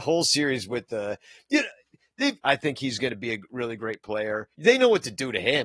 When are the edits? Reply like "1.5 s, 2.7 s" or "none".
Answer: 2.4 s, 4.5 s